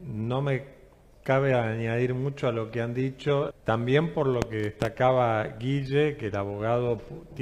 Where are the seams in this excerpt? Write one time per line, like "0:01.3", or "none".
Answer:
0:03.5

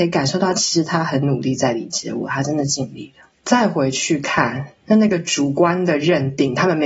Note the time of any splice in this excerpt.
0:03.4

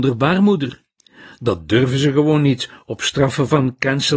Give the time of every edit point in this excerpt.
none

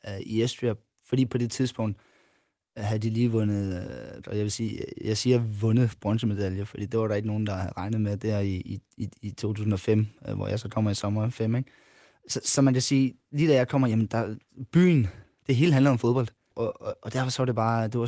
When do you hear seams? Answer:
0:04.2
0:16.5

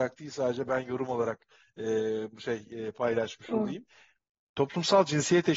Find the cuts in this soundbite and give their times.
none

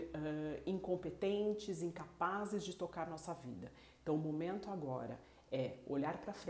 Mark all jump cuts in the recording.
none

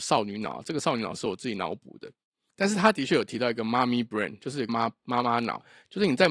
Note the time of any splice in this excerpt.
0:04.7

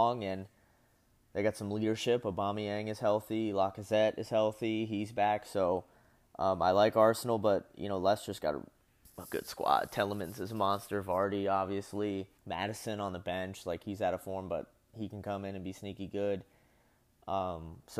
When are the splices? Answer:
0:12.4

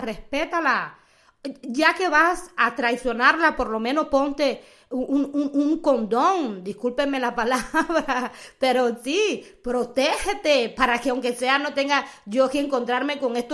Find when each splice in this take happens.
none

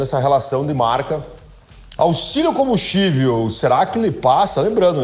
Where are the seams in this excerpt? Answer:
0:02.0

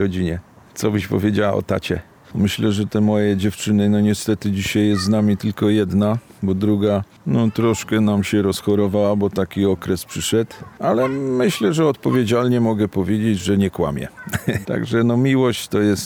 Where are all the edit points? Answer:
0:02.2
0:14.6

